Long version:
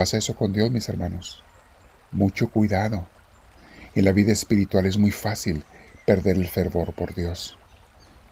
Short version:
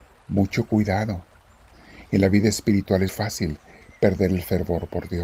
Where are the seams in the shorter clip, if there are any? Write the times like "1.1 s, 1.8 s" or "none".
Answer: 3.1 s